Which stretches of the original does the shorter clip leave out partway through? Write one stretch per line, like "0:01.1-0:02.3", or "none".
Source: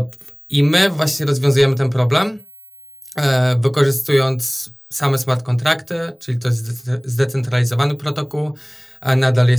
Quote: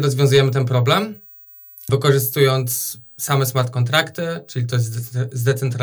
0:03.1-0:03.6